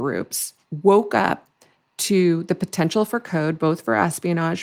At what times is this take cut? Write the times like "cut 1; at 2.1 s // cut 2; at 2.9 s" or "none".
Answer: none